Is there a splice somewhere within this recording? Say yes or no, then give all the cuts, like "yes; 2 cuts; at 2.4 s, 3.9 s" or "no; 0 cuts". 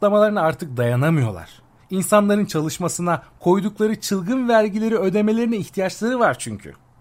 yes; 1 cut; at 3.4 s